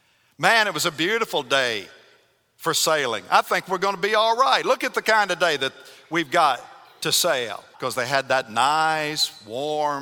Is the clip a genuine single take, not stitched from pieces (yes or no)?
no